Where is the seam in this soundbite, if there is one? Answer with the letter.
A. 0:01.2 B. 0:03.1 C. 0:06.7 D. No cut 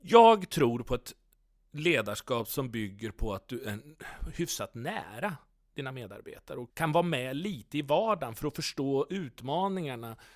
C